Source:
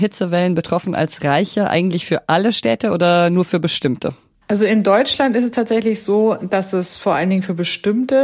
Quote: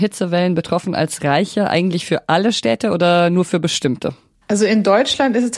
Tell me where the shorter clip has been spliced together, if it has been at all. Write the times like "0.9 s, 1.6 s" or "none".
none